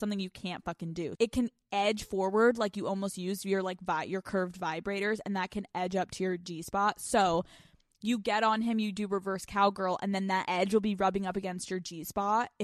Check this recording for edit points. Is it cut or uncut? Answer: cut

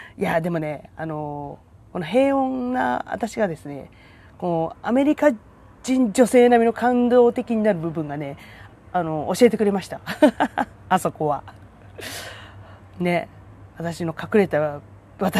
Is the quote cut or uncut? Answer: cut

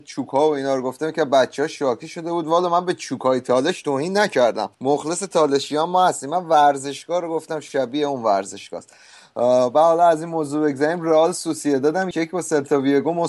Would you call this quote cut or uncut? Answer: cut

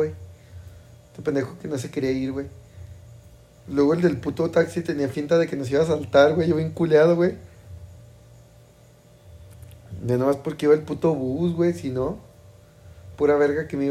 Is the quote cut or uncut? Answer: uncut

